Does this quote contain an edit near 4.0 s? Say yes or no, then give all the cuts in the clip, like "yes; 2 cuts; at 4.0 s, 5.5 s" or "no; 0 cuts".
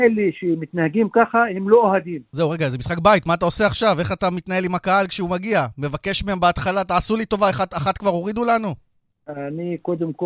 no; 1 cut; at 2.3 s